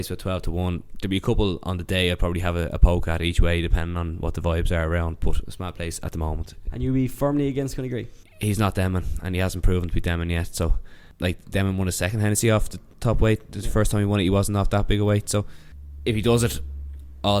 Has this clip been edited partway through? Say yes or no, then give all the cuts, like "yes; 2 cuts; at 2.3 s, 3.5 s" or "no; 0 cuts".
no; 0 cuts